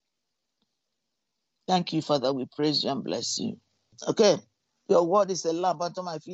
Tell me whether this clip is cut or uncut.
uncut